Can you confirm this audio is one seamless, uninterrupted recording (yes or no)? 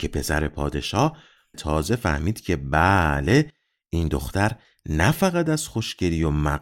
no